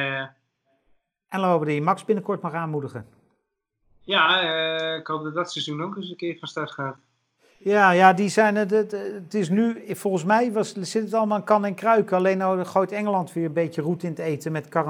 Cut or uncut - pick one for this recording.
uncut